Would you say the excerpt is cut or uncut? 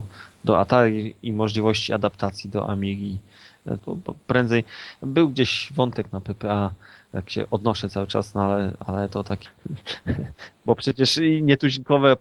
cut